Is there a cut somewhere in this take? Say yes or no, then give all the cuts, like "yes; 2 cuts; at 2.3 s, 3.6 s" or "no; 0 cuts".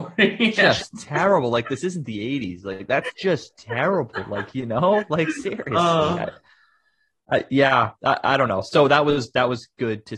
no; 0 cuts